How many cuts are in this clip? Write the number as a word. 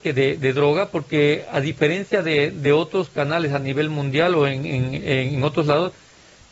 zero